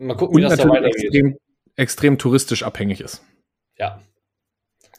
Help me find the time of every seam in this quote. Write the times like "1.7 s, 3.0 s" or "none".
none